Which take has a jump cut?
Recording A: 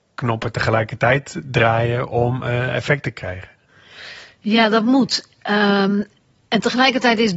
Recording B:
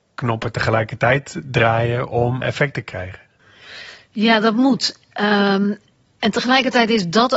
B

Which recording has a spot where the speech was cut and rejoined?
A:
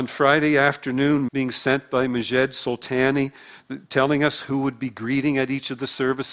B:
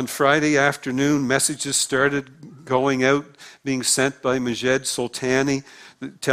A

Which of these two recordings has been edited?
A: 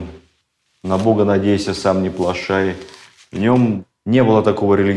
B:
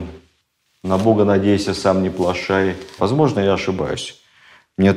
B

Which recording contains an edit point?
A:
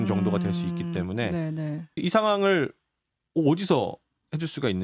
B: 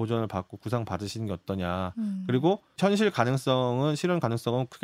A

